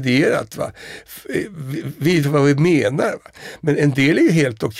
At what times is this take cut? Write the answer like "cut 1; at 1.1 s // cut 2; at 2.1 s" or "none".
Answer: cut 1; at 2.2 s